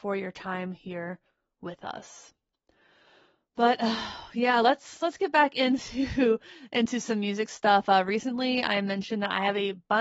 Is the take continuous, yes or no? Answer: yes